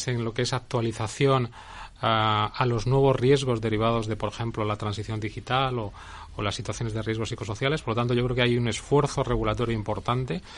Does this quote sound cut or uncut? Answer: uncut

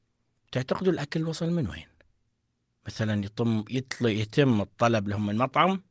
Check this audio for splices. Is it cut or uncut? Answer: uncut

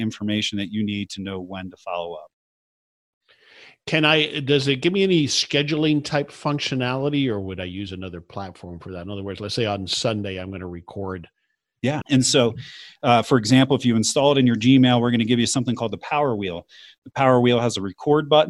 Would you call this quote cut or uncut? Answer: cut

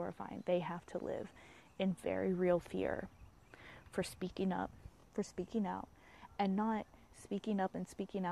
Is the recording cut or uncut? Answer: uncut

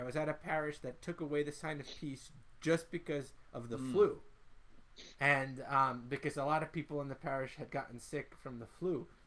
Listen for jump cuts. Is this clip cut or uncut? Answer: uncut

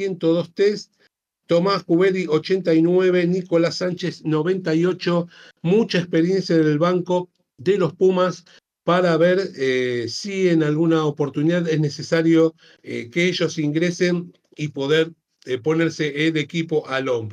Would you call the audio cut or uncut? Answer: uncut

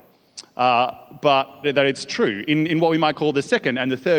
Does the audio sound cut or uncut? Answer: cut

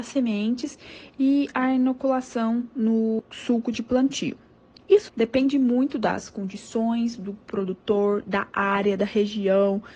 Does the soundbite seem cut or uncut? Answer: uncut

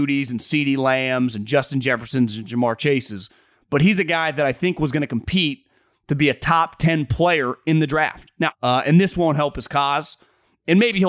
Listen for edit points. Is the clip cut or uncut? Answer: cut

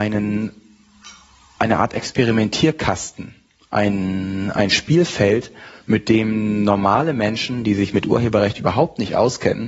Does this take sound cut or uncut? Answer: uncut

